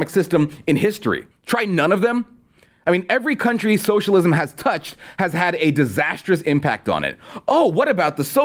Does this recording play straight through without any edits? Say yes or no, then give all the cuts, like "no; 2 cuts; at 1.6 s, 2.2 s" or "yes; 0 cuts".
no; 1 cut; at 1.3 s